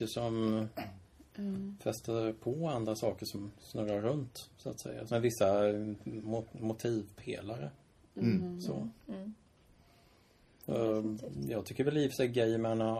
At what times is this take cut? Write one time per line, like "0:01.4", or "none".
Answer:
0:05.1